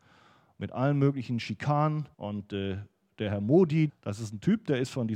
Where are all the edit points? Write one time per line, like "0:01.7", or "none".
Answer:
0:02.1
0:03.9